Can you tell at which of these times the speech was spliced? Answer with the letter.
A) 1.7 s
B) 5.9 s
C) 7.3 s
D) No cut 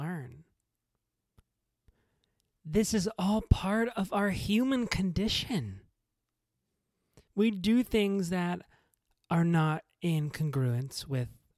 C